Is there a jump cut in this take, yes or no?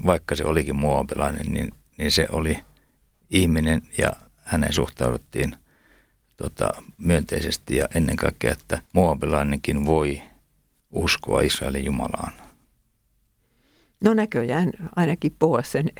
yes